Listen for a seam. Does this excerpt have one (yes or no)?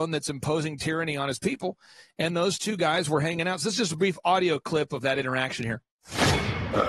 no